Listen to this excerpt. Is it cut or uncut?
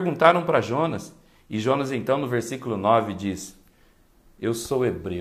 uncut